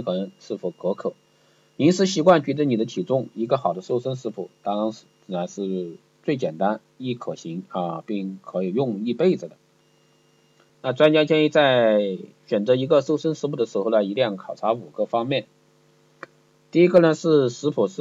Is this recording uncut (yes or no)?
no